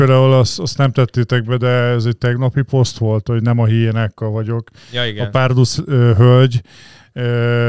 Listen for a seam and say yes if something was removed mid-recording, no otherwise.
no